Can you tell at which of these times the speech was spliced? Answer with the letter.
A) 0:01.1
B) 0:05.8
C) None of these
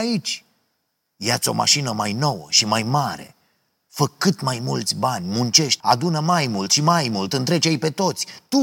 B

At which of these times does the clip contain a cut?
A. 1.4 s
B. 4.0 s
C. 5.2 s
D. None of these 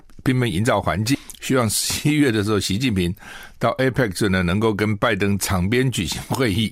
D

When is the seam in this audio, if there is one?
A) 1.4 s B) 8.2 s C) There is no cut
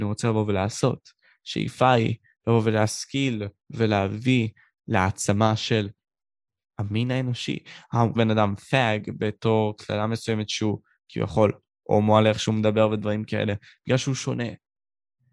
B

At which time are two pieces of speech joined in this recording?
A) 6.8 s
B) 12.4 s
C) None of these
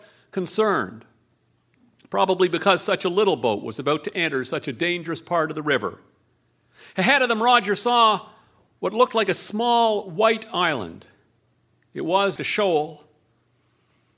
B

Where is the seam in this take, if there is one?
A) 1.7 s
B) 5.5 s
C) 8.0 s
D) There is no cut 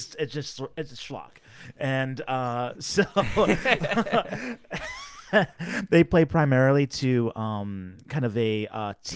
D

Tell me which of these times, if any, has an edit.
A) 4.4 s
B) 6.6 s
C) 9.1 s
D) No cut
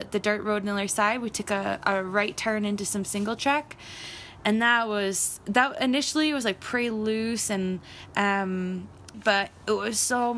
C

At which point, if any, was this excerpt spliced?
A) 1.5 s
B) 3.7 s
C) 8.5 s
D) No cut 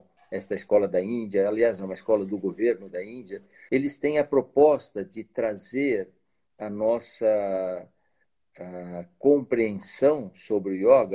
B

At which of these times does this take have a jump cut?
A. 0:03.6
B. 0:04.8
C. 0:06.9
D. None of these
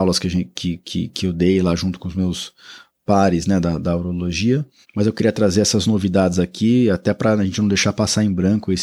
B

